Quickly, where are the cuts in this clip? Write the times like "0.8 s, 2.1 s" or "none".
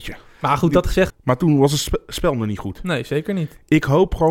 1.1 s